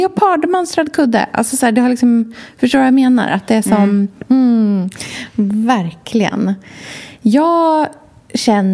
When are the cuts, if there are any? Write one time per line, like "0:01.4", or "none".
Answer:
0:04.3